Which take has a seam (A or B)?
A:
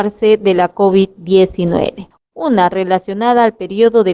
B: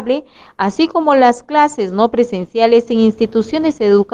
A